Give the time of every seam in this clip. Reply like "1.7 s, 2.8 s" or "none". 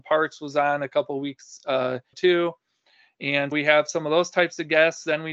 2.1 s, 3.5 s